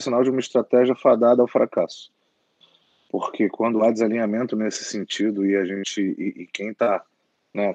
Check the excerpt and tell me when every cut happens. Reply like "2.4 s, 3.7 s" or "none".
none